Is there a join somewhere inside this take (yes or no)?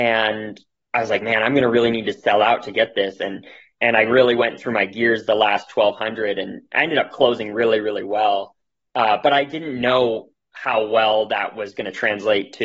no